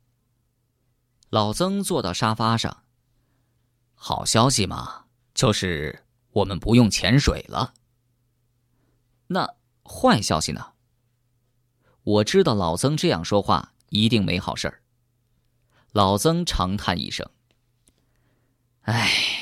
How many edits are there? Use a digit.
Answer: 0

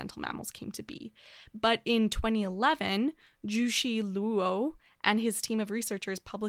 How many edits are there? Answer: 0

